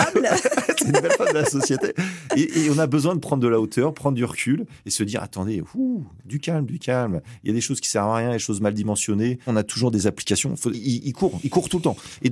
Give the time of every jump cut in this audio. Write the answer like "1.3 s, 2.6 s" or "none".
9.5 s, 10.7 s